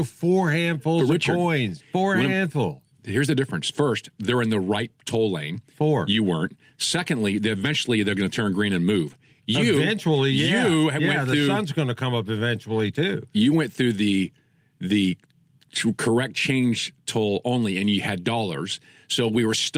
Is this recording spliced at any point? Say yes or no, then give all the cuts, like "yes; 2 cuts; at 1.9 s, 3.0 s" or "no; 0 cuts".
yes; 1 cut; at 1.8 s